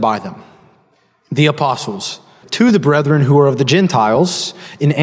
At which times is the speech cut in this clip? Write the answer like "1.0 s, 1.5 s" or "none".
2.4 s